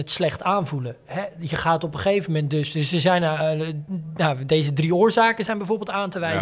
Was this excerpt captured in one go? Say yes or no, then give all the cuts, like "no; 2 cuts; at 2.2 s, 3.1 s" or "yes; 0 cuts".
yes; 0 cuts